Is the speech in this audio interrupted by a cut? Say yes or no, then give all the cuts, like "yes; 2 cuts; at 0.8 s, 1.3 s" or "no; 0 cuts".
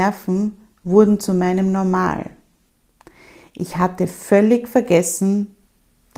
no; 0 cuts